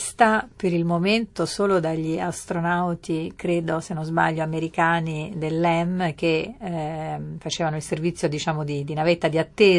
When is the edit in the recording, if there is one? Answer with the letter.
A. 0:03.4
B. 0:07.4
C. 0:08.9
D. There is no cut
D